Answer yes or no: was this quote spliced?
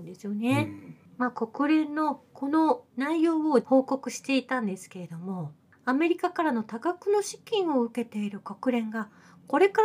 no